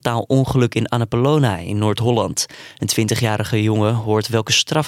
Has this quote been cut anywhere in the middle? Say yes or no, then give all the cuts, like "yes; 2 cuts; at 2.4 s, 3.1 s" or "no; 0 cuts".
no; 0 cuts